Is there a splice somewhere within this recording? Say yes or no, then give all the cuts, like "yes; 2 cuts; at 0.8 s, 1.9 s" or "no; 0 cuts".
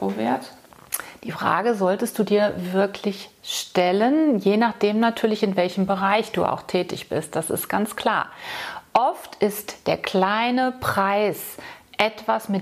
no; 0 cuts